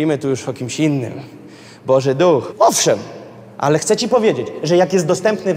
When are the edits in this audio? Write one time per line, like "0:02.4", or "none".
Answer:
0:02.5